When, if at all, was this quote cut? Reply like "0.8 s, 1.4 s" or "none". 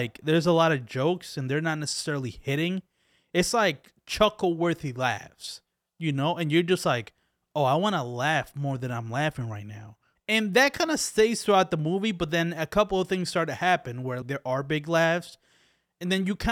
10.2 s, 14.2 s